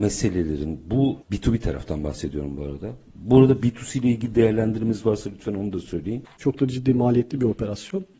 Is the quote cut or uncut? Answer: cut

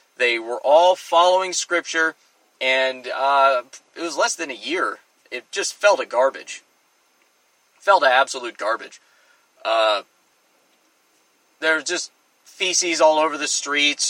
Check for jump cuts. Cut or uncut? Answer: uncut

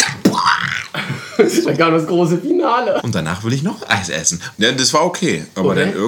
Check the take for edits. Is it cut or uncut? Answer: cut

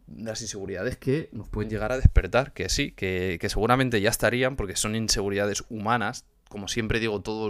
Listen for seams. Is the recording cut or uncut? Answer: uncut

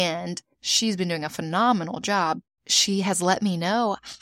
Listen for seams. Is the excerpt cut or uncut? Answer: uncut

